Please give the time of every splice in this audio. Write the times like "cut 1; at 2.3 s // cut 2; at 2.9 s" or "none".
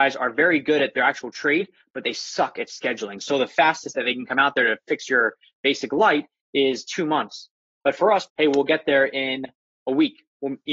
cut 1; at 8.3 s